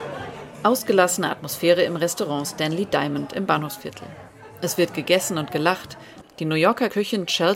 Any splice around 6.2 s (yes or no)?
yes